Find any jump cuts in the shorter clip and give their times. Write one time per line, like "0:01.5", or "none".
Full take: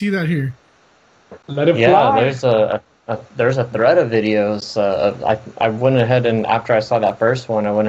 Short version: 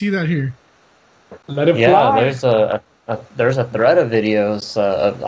none

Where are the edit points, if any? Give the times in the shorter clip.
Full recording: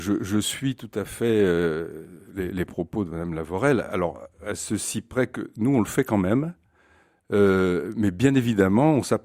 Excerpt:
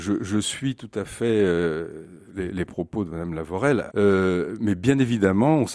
0:03.9

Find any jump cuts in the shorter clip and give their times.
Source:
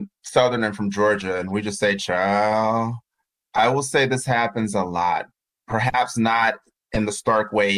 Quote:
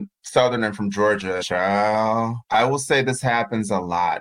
0:01.4
0:02.4

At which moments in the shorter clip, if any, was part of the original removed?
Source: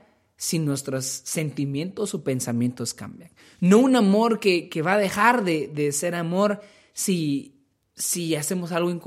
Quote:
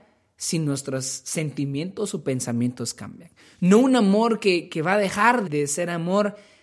0:05.4

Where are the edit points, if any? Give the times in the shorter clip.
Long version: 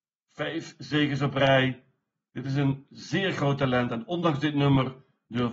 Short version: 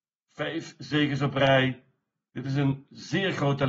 none

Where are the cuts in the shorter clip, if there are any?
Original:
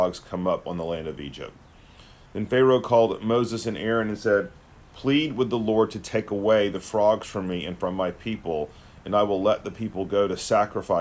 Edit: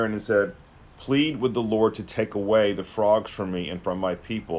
none

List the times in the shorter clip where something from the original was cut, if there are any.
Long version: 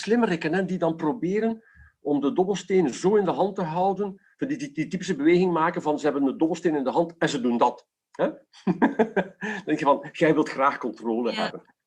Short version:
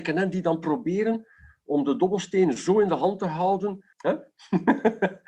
0:03.9

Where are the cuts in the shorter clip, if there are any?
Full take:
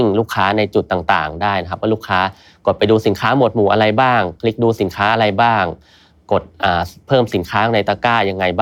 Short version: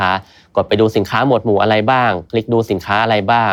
none

